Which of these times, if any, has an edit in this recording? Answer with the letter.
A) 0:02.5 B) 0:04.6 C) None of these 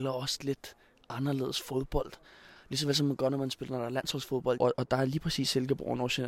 B